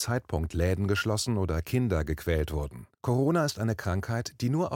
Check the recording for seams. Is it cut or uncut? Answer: cut